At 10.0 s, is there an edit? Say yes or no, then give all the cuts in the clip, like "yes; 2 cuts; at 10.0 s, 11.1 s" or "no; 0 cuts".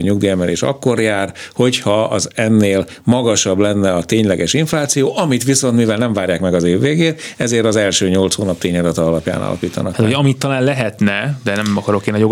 no; 0 cuts